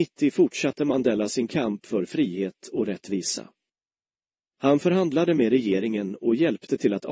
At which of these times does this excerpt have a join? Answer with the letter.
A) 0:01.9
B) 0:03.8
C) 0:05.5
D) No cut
D